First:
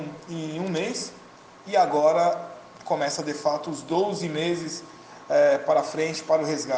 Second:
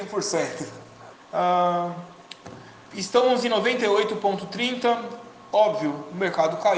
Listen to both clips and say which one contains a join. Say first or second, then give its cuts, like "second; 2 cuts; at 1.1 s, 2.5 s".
second; 1 cut; at 1.1 s